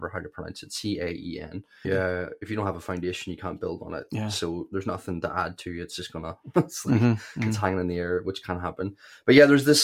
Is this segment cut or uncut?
cut